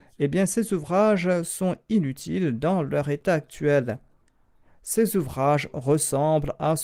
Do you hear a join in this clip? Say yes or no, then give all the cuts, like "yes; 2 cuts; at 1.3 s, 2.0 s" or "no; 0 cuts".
no; 0 cuts